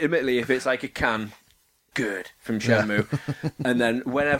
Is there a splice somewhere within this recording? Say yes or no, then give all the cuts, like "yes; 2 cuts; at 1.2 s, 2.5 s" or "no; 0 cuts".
yes; 1 cut; at 1.9 s